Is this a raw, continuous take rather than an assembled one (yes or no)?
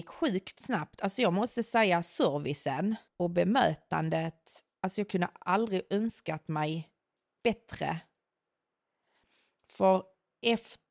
yes